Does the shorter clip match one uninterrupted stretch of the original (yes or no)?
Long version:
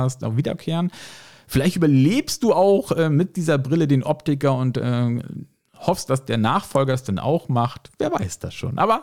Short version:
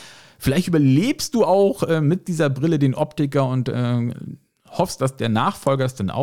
yes